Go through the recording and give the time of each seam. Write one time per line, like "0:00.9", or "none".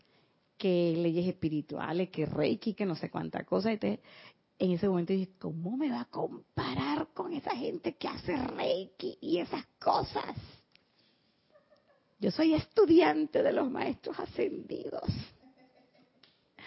0:02.7

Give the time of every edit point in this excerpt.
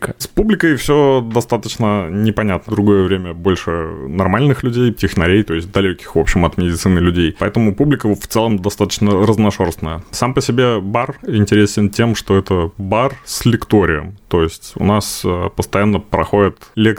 0:02.7
0:04.9

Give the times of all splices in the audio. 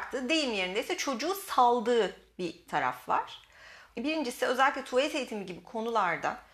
0:03.9

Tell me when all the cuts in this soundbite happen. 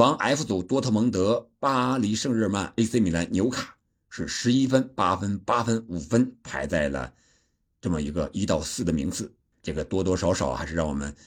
0:09.5

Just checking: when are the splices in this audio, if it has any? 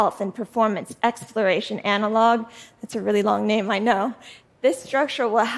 none

